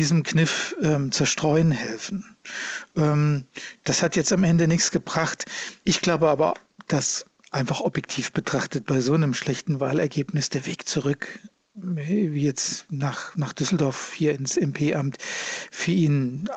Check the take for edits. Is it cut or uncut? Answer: cut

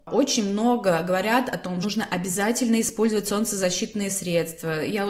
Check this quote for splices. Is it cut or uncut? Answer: cut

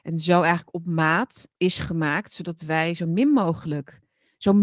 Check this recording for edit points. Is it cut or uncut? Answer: cut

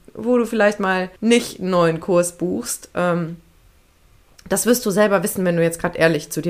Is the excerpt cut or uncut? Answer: cut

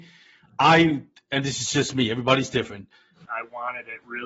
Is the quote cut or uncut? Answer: cut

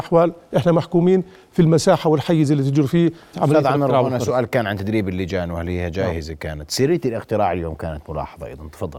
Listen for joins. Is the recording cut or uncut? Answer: cut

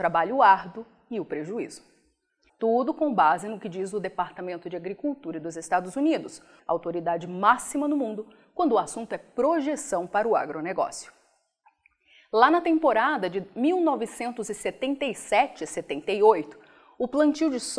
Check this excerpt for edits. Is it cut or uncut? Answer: cut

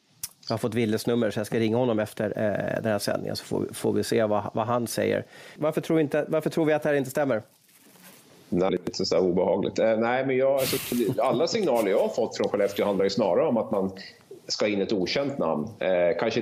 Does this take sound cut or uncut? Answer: cut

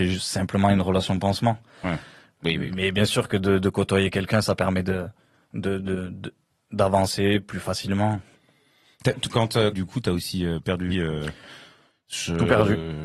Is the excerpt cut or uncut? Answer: cut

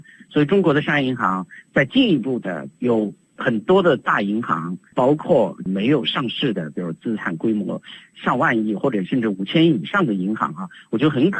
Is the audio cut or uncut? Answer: cut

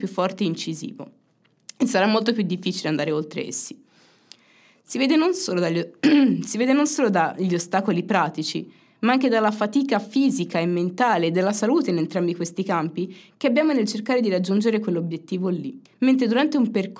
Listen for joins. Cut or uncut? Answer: cut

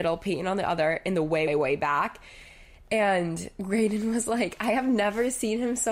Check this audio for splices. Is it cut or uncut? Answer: cut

